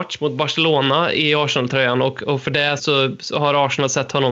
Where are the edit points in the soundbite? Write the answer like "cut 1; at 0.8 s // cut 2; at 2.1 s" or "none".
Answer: cut 1; at 2.8 s